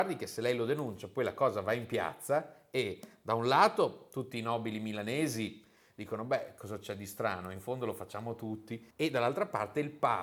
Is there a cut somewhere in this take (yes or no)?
yes